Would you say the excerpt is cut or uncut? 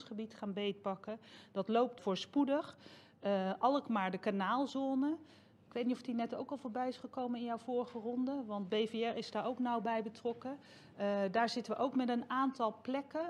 cut